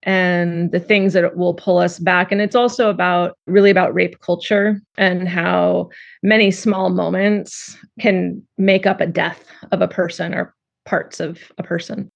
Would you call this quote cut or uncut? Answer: cut